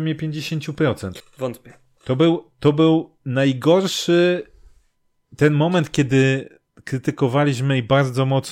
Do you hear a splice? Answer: yes; 1 cut; at 1.2 s

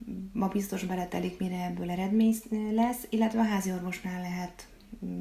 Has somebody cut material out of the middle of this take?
no; 0 cuts

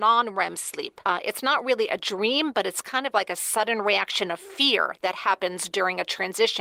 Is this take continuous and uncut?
yes; 0 cuts

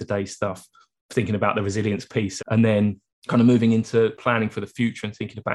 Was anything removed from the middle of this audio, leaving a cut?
yes; 1 cut; at 2.4 s

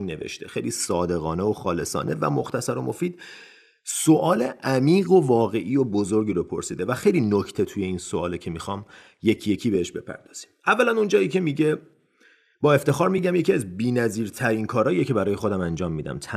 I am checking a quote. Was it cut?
no; 0 cuts

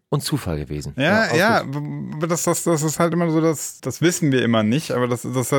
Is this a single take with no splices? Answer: no; 1 cut; at 3.8 s

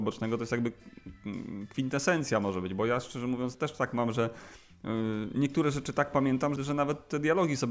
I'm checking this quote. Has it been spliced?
yes; 2 cuts; at 3.5 s, 6.6 s

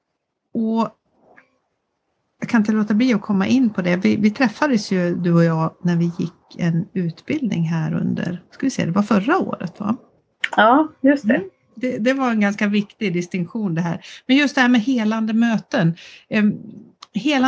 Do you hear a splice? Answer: yes; 1 cut; at 10.5 s

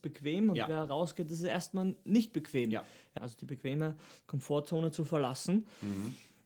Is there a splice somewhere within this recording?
yes; 1 cut; at 3.2 s

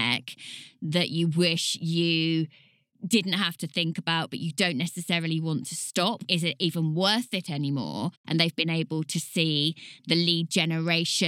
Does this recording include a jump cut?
yes; 2 cuts; at 6.3 s, 8.2 s

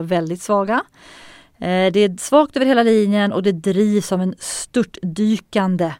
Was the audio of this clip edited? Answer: no; 0 cuts

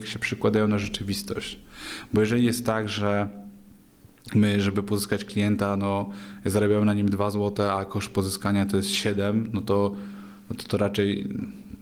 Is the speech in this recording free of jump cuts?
yes; 0 cuts

